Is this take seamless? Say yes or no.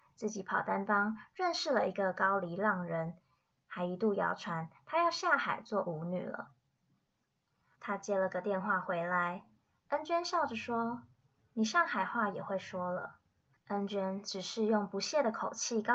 no